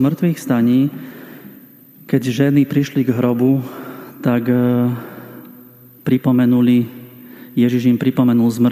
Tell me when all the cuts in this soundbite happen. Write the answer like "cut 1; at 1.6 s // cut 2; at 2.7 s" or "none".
none